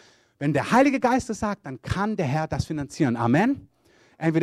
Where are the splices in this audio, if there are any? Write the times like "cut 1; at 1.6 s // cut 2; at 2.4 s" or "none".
none